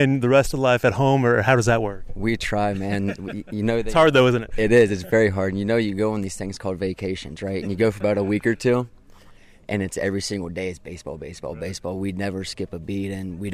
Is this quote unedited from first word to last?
yes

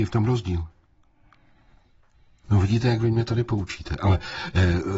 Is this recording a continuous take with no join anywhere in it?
no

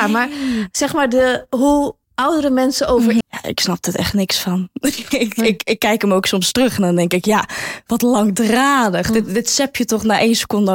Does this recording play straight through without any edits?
no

